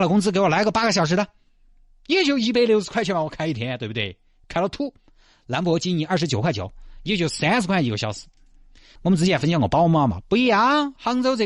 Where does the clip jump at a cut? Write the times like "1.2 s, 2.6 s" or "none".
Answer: 9.0 s